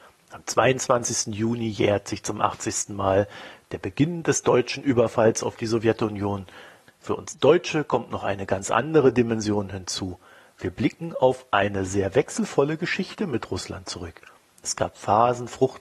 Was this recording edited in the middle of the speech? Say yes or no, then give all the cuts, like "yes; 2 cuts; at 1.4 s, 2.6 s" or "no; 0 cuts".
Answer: yes; 1 cut; at 6.9 s